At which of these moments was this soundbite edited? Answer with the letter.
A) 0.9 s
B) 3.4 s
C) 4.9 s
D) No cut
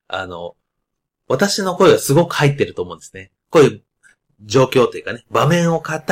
B